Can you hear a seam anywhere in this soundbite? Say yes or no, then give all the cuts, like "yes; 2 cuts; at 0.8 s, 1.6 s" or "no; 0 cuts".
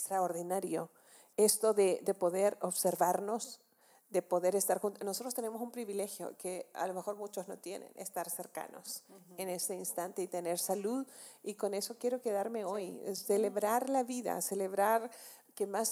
no; 0 cuts